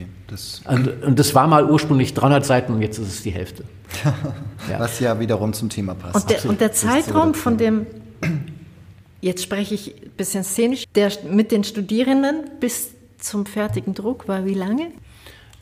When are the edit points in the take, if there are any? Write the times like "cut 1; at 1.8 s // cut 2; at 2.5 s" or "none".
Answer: cut 1; at 10.8 s